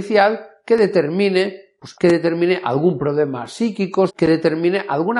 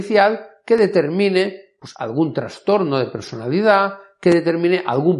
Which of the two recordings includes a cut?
first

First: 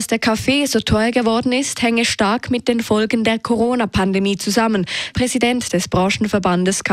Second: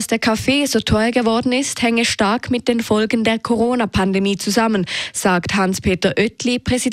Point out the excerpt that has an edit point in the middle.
first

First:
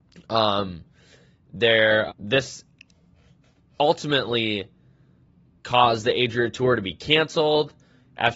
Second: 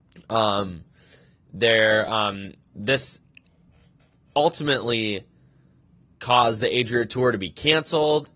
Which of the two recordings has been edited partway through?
first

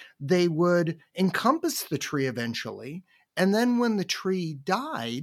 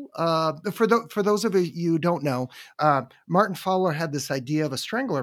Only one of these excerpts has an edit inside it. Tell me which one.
second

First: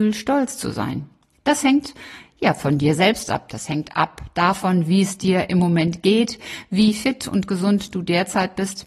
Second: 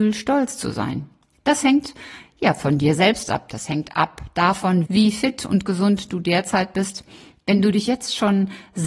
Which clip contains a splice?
second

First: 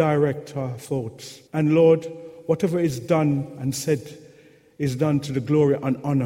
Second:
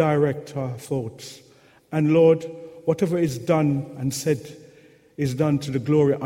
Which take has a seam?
first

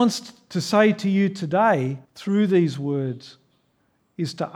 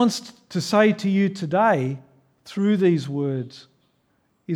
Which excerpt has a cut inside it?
first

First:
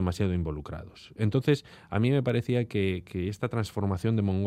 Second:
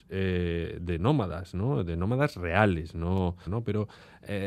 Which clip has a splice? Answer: second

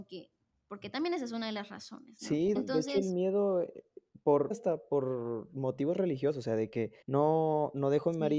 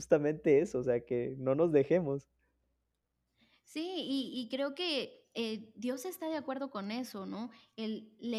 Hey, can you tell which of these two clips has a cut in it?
first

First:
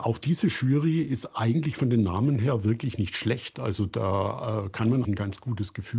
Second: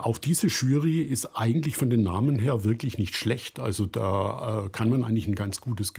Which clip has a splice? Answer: first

